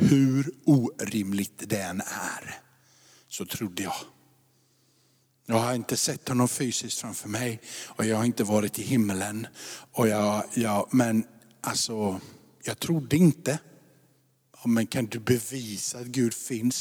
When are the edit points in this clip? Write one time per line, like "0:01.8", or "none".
0:10.5
0:14.5